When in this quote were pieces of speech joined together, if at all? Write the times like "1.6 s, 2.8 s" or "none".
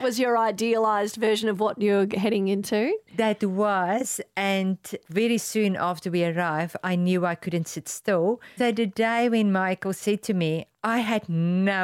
8.6 s, 10.7 s